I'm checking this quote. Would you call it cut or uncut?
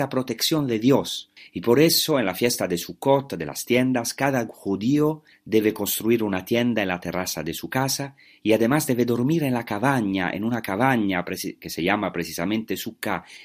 uncut